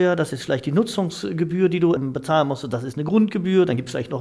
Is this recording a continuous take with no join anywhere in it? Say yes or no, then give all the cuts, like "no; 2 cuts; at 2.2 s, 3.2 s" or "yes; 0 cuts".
no; 1 cut; at 2.0 s